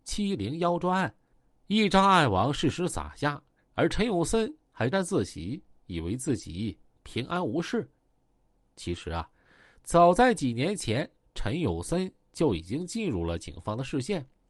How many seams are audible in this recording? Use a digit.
1